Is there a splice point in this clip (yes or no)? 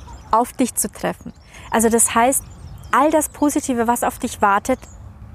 no